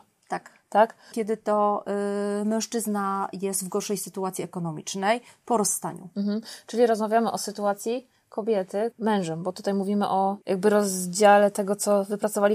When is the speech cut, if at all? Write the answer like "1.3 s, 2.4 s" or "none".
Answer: 1.1 s, 8.9 s, 10.4 s